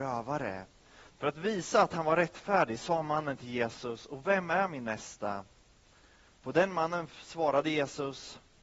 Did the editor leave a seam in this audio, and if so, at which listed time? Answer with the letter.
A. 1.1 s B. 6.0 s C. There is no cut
A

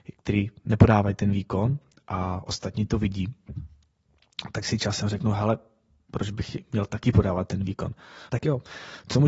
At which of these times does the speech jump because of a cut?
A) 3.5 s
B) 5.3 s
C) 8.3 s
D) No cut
C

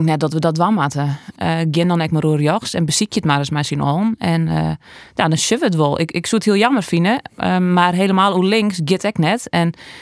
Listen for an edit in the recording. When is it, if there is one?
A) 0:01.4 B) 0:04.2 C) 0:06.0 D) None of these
A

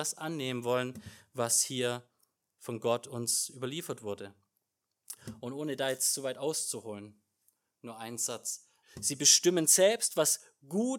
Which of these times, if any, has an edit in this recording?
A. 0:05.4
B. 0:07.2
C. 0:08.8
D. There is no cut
C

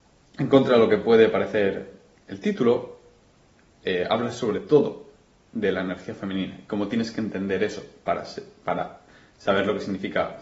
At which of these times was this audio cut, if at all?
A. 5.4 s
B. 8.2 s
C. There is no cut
A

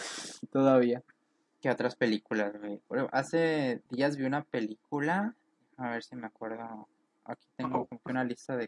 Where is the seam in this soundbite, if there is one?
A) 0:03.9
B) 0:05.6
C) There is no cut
A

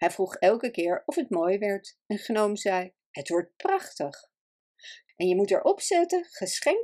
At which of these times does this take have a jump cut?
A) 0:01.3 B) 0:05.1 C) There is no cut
B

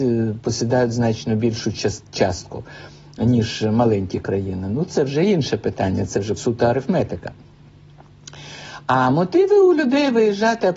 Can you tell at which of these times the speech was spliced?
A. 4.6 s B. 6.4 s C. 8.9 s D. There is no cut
B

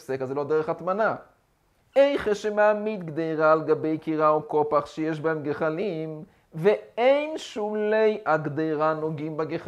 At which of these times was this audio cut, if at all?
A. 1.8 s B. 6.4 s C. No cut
A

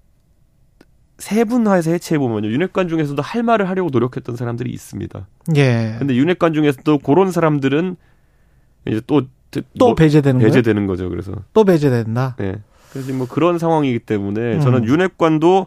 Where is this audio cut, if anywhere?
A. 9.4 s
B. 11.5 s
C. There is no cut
B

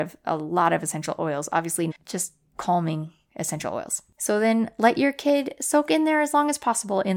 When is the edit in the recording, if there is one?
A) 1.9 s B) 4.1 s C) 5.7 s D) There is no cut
A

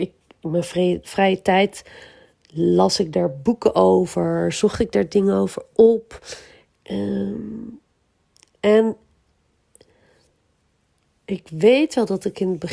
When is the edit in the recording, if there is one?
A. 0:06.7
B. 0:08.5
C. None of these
A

